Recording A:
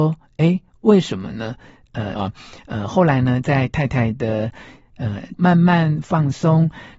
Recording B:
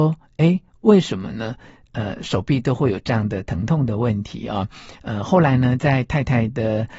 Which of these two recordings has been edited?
A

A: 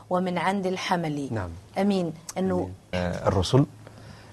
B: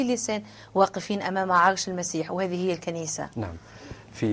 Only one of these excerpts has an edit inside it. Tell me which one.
A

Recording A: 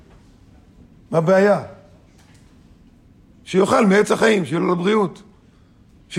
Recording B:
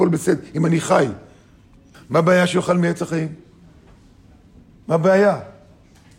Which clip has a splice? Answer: B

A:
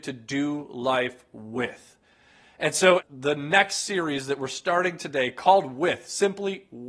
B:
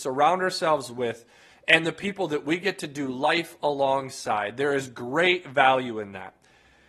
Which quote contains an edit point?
A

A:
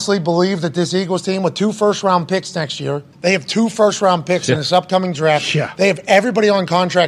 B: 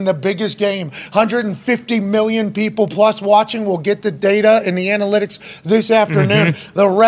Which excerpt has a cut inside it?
A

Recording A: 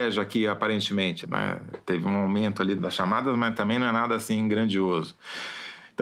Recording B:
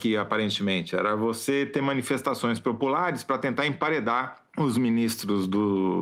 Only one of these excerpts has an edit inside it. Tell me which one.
A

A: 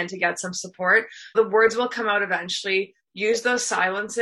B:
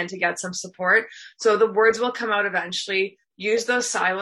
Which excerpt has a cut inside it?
A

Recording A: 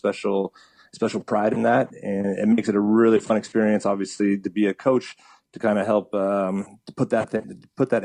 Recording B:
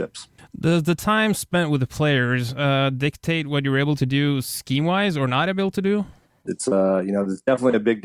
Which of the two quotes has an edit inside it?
B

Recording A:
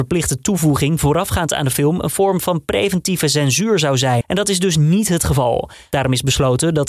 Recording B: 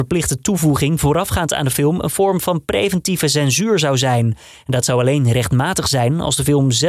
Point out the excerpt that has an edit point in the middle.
A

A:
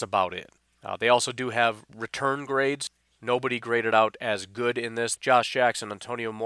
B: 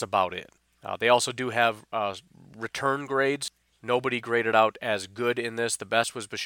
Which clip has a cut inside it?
A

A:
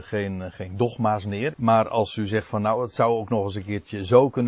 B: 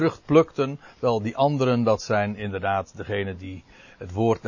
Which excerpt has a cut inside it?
A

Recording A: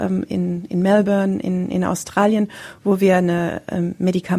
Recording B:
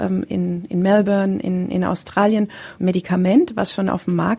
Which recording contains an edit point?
B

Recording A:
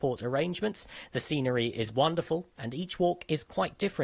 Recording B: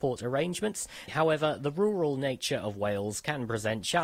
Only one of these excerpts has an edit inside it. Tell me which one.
B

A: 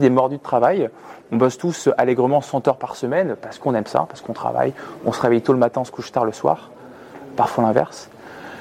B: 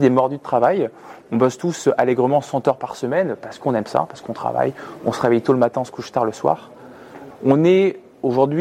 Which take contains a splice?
B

